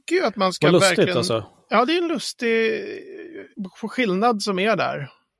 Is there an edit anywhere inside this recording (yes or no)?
no